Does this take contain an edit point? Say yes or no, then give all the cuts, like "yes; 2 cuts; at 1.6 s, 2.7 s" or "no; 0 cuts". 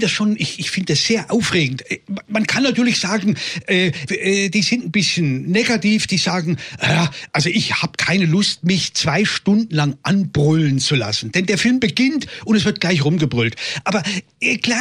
yes; 1 cut; at 4.1 s